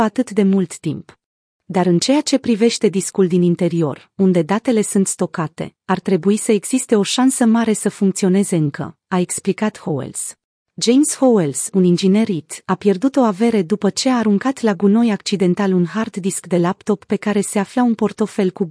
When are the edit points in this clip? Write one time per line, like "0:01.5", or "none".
0:01.4
0:10.5